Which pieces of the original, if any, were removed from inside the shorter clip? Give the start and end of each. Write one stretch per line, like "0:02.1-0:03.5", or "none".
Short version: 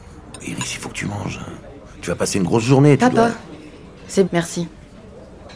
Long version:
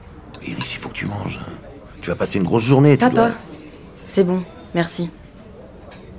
0:04.3-0:04.7